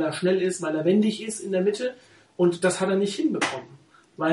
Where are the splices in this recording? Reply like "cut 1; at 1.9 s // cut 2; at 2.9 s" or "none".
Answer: none